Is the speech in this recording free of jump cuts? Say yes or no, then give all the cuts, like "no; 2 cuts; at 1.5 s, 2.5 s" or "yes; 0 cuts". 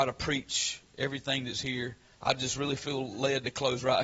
no; 1 cut; at 2.1 s